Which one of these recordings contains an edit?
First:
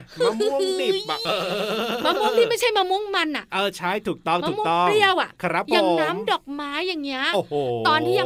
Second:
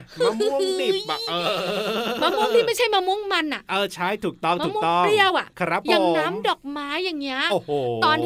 first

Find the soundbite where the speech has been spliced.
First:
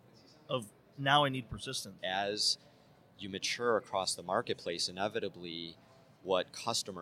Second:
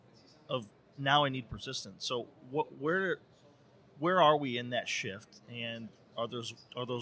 first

